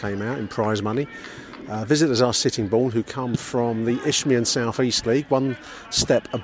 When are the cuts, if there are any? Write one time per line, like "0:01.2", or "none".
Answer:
none